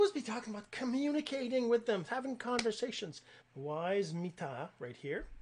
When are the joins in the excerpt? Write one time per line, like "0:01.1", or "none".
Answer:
0:02.1
0:03.4